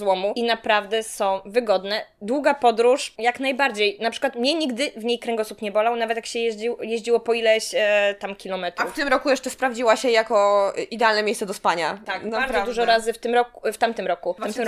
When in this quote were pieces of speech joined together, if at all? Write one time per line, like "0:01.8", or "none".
none